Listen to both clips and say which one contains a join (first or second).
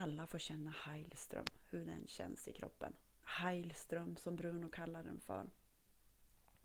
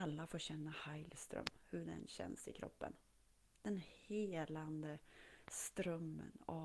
first